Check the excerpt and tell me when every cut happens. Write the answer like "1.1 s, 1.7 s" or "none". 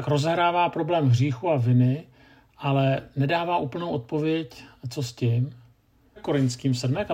6.2 s